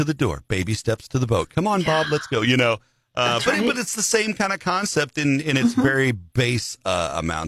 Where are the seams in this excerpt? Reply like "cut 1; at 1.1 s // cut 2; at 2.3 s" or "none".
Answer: none